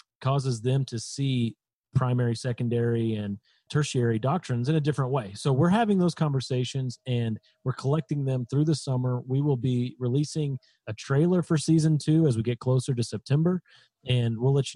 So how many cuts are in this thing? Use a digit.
1